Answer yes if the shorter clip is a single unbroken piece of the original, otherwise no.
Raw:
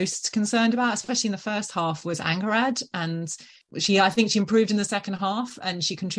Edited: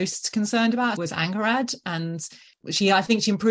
no